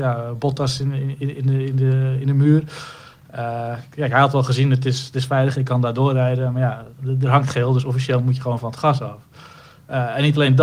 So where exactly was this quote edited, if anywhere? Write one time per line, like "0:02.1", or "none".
none